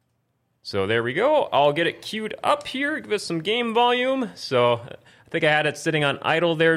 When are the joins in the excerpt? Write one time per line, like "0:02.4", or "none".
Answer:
none